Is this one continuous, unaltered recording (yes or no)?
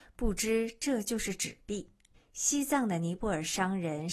no